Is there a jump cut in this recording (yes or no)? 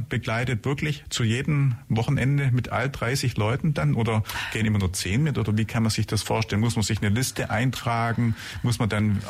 no